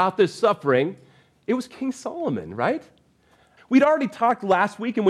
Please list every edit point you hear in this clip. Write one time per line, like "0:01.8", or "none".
0:03.6